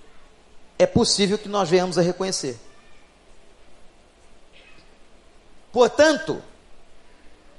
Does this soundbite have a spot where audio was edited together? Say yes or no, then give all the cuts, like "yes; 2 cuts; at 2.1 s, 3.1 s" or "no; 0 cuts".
yes; 1 cut; at 5.6 s